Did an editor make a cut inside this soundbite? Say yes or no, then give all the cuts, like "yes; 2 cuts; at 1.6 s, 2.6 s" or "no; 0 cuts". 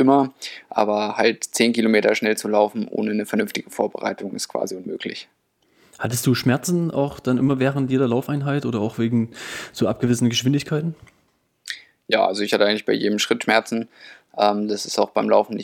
no; 0 cuts